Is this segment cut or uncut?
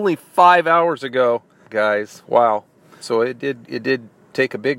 cut